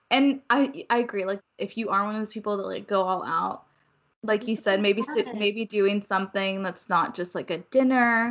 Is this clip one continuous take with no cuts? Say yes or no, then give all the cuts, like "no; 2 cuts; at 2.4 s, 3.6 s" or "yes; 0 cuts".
no; 1 cut; at 1.4 s